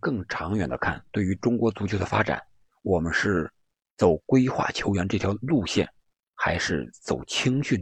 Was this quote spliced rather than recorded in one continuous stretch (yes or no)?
no